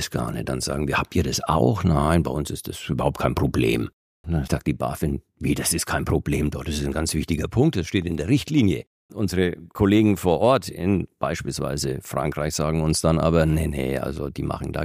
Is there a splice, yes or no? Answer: yes